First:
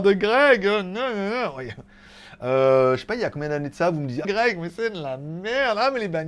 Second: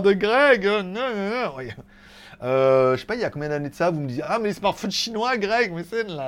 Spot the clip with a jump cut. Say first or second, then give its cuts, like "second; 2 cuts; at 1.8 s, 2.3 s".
first; 1 cut; at 4.2 s